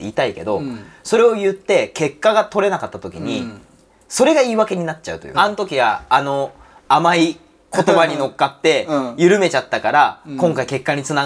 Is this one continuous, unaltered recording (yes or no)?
no